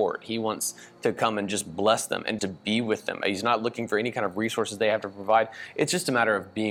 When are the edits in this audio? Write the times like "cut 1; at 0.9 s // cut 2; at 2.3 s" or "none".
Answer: cut 1; at 2.4 s